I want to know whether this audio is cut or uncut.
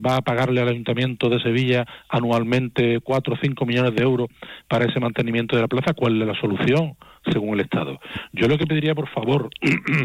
uncut